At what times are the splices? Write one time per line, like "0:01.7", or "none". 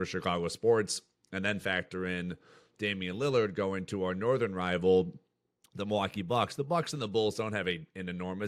none